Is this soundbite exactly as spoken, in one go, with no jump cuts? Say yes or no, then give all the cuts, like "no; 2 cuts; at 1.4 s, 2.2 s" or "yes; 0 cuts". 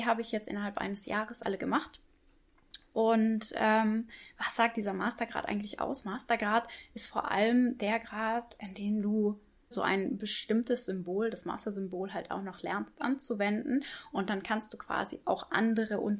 no; 1 cut; at 9.7 s